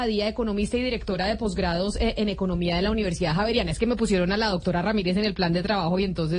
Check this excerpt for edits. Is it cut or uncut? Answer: uncut